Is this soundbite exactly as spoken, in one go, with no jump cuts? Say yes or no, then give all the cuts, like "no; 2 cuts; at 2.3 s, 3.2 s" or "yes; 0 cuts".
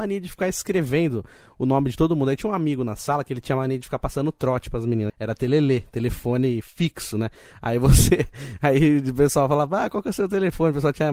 no; 1 cut; at 5.1 s